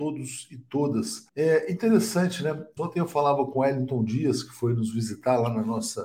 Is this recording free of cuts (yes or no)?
no